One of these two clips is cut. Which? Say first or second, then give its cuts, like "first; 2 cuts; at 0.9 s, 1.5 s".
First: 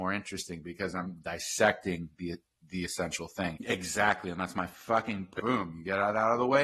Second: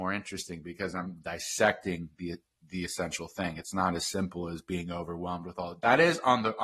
first; 2 cuts; at 3.6 s, 5.4 s